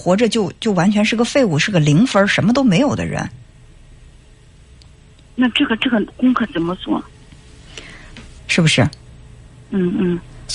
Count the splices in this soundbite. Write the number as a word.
one